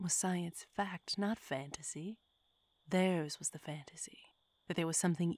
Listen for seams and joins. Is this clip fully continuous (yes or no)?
yes